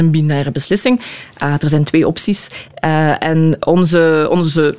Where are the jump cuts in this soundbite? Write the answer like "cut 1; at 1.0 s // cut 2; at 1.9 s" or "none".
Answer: none

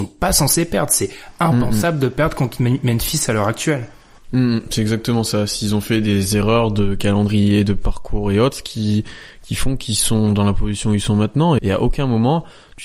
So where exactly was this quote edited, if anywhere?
cut 1; at 11.6 s

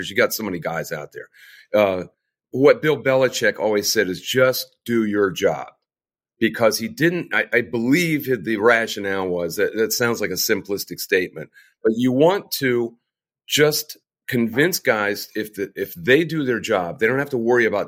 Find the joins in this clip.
none

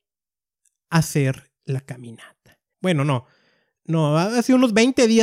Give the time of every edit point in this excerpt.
cut 1; at 2.7 s

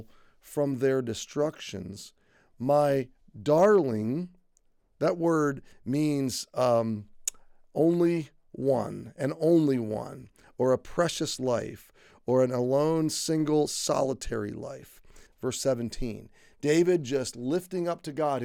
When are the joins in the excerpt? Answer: cut 1; at 15.3 s

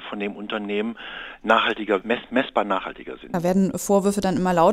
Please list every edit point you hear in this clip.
cut 1; at 2.0 s // cut 2; at 3.3 s

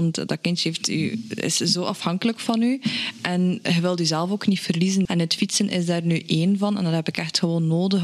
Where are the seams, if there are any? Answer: cut 1; at 5.1 s

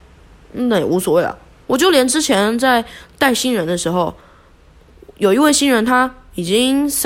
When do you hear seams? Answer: cut 1; at 1.6 s

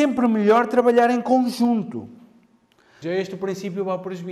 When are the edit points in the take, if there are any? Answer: cut 1; at 3.0 s

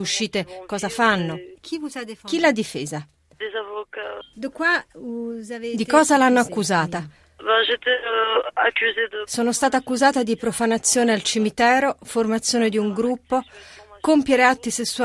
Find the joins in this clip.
cut 1; at 4.2 s

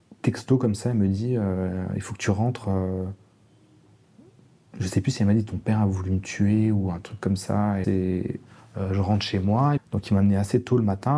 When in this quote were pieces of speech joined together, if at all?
cut 1; at 7.8 s // cut 2; at 9.8 s

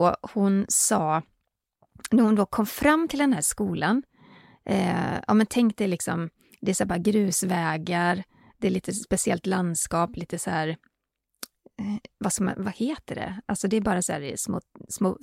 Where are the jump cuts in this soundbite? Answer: none

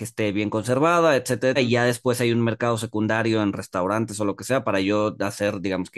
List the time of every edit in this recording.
cut 1; at 1.6 s

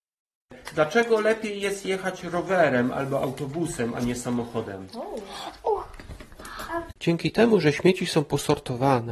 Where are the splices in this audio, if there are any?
cut 1; at 6.9 s

